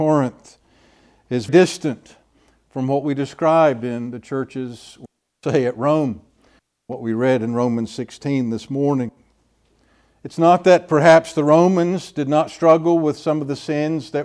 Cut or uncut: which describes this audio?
cut